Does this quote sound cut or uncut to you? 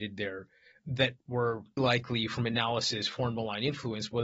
cut